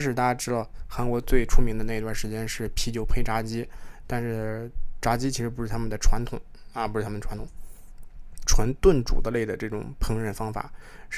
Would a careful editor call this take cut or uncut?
cut